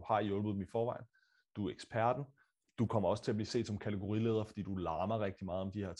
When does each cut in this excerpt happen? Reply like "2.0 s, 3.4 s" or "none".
none